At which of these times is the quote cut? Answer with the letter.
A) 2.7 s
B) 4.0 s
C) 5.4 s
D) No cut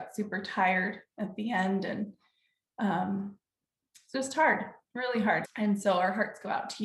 C